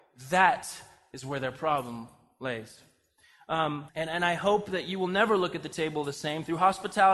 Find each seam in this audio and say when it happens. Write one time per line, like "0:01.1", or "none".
0:03.9